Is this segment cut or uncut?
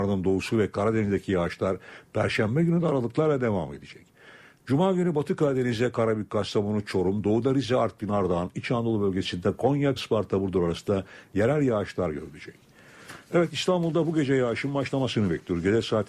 cut